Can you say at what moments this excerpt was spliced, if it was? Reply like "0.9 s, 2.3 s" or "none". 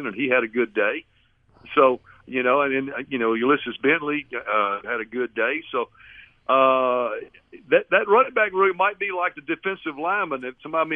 4.8 s